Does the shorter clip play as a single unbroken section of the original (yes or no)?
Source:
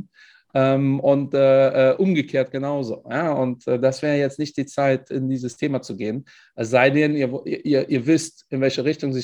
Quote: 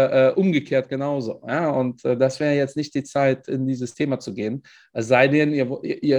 yes